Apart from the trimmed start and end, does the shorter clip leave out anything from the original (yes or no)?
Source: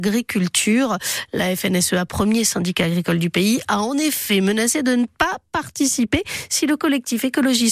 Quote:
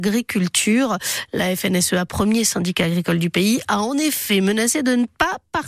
no